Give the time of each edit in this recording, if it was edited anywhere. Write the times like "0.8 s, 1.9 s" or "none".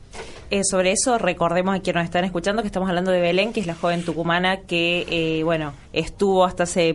5.8 s